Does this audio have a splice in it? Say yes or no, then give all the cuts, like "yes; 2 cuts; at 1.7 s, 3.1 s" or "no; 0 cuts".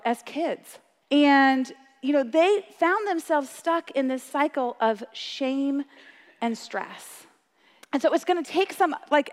yes; 2 cuts; at 1.0 s, 7.8 s